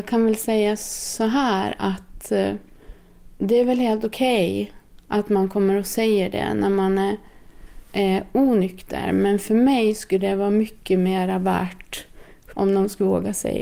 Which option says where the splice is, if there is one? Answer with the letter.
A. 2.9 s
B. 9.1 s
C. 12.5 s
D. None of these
C